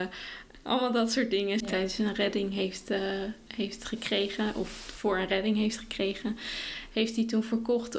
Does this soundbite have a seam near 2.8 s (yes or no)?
no